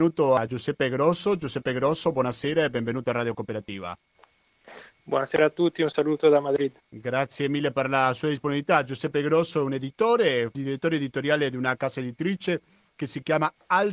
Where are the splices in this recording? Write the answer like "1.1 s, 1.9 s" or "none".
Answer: none